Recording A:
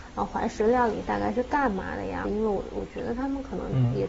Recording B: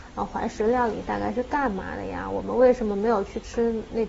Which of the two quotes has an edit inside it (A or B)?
A